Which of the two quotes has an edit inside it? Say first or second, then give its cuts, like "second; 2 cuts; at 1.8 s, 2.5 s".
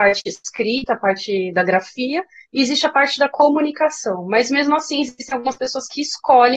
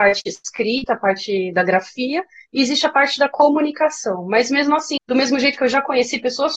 second; 1 cut; at 5.0 s